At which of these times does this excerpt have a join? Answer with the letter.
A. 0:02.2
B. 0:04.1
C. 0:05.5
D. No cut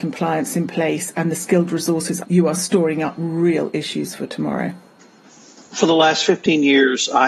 A